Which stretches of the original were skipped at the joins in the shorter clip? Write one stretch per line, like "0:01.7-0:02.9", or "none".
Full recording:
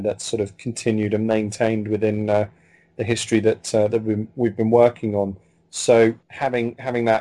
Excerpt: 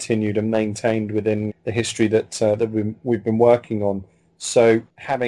0:02.3-0:02.8